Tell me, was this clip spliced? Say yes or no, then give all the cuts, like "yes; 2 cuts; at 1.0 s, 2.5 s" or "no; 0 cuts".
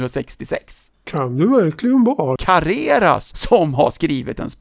yes; 2 cuts; at 0.9 s, 2.4 s